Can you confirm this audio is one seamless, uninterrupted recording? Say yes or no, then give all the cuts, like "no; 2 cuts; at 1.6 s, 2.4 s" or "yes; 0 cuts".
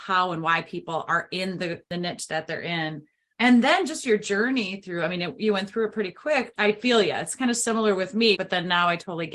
no; 2 cuts; at 6.5 s, 8.3 s